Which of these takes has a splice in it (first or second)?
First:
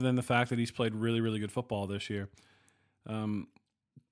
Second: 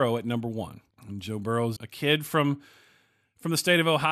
second